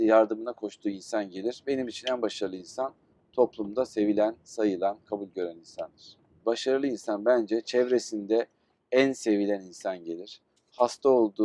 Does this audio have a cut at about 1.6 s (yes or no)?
no